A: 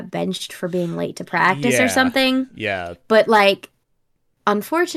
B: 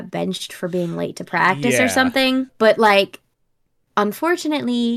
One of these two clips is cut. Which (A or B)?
B